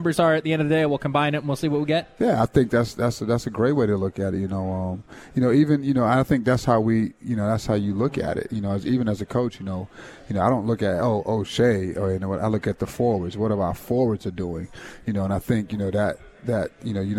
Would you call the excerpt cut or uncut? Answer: uncut